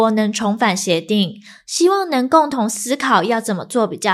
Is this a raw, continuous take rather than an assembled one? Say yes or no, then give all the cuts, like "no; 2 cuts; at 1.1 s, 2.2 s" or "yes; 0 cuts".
yes; 0 cuts